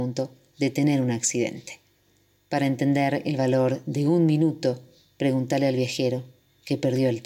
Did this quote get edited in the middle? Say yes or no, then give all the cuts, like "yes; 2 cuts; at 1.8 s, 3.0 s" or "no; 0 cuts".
yes; 1 cut; at 2.4 s